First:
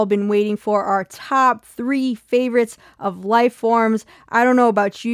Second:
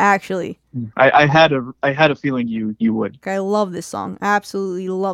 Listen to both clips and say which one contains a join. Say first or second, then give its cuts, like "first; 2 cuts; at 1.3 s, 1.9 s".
second; 2 cuts; at 0.9 s, 3.2 s